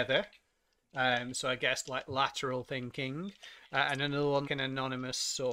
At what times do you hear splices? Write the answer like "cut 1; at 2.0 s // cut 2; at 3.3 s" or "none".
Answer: cut 1; at 4.4 s